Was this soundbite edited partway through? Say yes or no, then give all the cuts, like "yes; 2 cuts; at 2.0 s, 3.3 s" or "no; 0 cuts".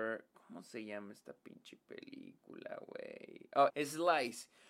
yes; 1 cut; at 3.7 s